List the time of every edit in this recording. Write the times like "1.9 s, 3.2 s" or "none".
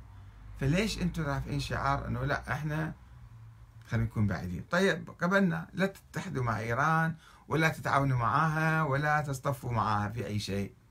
4.7 s